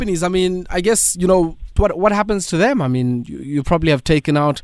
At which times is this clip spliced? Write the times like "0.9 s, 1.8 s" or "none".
1.8 s